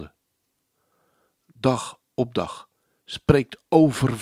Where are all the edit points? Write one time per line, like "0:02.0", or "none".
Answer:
none

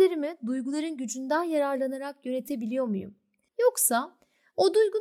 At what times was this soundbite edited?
0:03.5

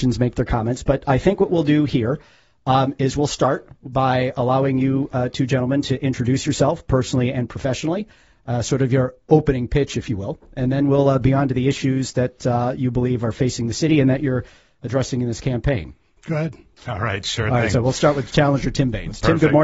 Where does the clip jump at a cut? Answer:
0:16.2

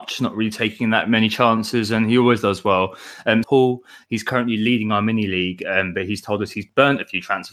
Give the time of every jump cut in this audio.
0:03.4

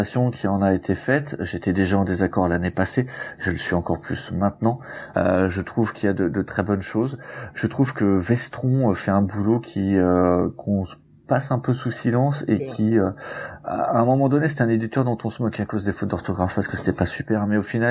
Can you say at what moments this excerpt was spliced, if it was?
0:05.1

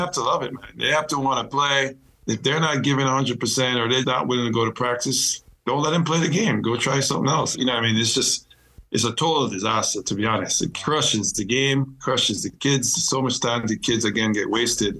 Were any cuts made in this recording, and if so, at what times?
0:04.0
0:07.5

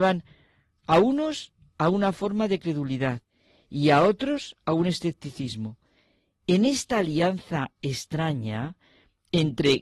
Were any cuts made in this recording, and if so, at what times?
none

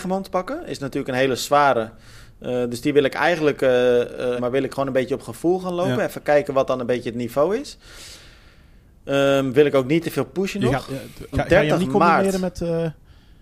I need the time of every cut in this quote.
0:04.4
0:11.3

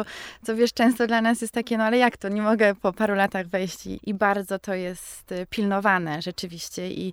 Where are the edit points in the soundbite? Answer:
0:04.0

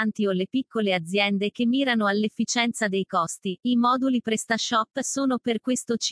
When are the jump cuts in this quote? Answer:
0:03.6

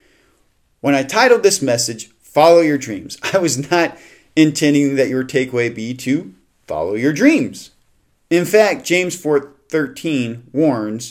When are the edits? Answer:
none

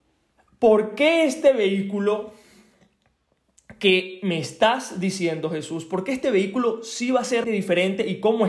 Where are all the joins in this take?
0:07.4

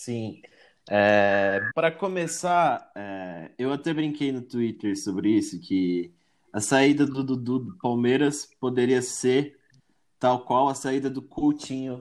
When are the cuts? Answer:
0:01.7

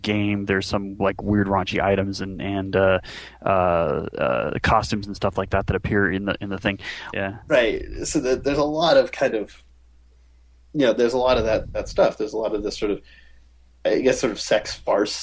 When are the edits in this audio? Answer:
0:07.1

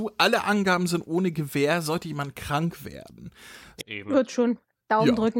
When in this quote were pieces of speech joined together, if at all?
0:03.8

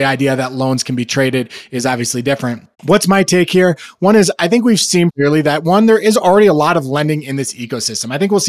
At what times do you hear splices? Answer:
0:02.7
0:05.1

